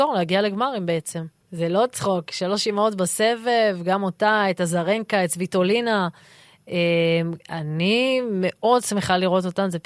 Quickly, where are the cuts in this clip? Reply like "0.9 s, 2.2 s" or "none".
1.4 s